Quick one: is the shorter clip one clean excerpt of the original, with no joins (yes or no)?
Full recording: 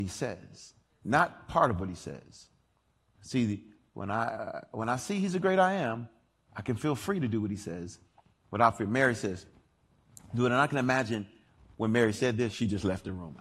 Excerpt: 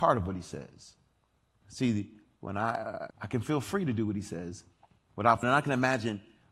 no